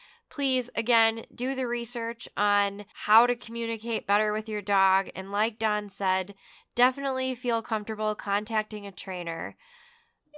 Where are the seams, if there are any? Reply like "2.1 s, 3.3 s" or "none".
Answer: none